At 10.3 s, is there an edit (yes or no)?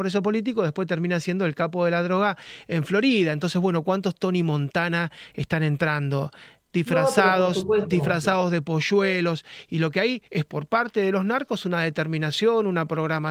yes